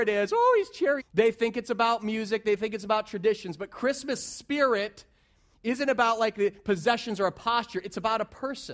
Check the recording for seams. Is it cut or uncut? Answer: cut